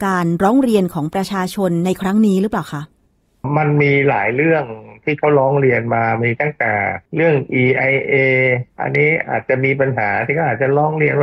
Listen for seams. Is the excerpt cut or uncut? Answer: cut